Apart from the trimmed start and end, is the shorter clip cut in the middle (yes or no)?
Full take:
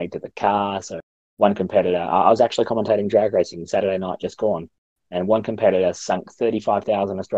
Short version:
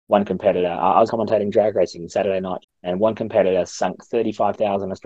yes